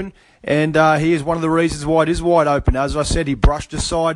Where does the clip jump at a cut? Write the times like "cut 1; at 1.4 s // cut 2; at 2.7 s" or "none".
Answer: none